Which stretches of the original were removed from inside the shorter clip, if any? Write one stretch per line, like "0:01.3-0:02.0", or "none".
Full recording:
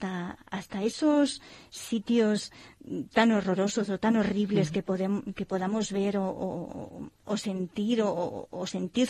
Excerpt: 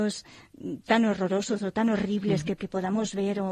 0:04.8-0:05.3